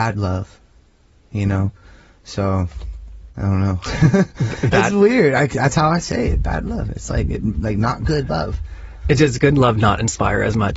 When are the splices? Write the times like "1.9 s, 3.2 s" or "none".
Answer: none